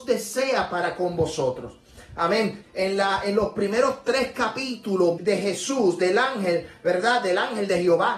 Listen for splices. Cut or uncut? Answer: cut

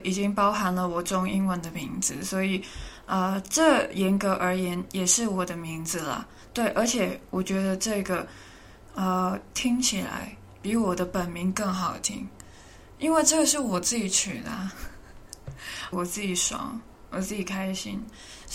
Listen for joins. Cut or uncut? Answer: cut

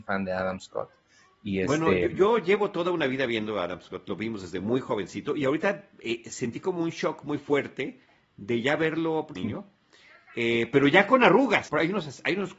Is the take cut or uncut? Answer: cut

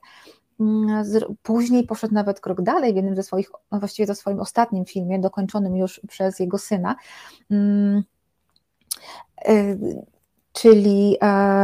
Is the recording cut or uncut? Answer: uncut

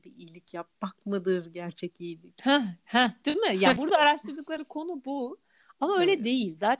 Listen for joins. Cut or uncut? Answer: cut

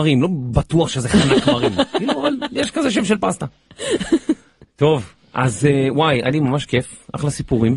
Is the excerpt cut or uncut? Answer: uncut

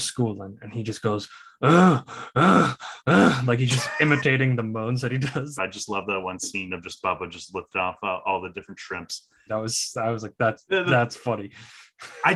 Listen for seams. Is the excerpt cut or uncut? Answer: cut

